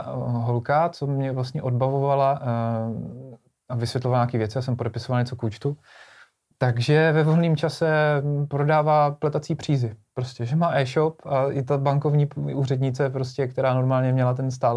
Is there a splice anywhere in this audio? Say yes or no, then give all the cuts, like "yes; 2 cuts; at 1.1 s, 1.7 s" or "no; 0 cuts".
no; 0 cuts